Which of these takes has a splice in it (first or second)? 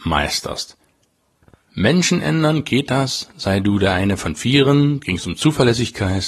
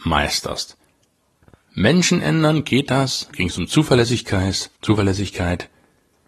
second